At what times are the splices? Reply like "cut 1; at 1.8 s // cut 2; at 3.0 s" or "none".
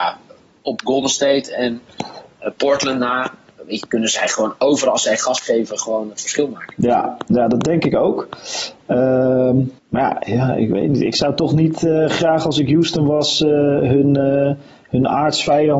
cut 1; at 9.8 s